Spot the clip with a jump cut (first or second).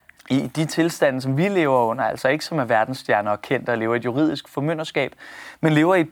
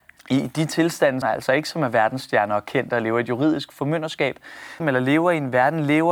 second